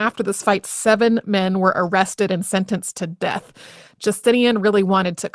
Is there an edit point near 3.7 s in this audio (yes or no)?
no